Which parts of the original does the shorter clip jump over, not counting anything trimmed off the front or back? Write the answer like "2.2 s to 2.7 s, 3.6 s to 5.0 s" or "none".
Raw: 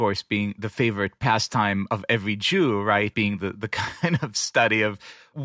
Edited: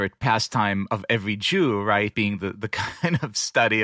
none

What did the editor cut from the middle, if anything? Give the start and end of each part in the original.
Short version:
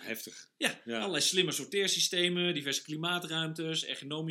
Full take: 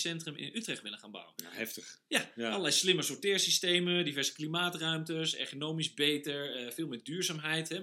none

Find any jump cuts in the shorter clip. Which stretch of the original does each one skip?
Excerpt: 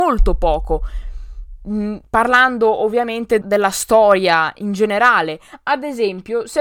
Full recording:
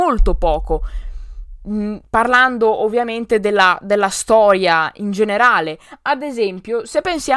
3.4 s to 3.8 s

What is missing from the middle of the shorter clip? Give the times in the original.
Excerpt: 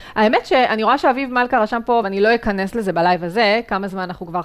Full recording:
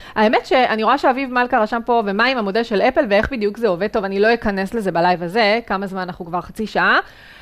2.0 s to 4.0 s

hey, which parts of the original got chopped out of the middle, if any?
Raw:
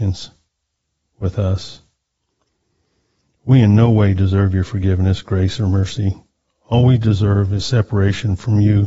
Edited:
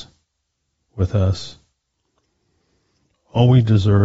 3.4 s to 6.5 s

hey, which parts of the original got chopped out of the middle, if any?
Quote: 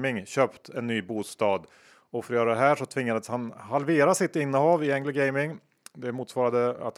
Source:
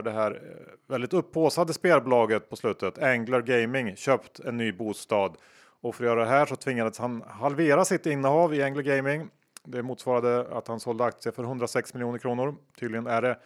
none

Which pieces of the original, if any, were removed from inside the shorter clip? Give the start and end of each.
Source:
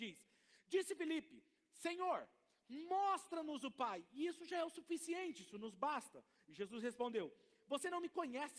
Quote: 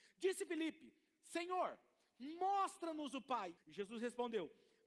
4.1 s to 6.4 s

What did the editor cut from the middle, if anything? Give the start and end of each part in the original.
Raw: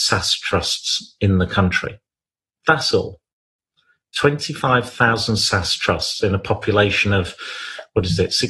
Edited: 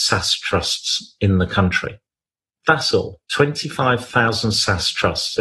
3.2 s to 4.1 s

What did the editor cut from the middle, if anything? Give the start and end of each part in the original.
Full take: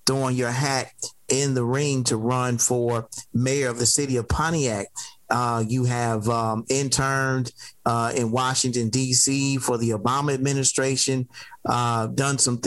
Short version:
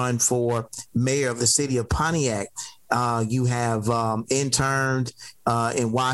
none

